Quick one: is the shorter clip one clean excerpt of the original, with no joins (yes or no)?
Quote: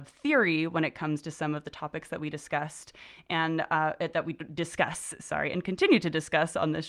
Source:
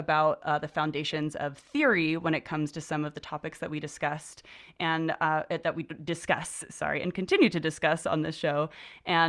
yes